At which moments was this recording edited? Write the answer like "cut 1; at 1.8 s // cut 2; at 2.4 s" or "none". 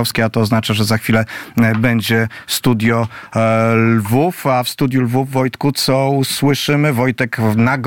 none